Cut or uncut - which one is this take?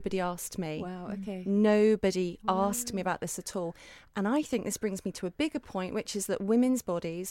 uncut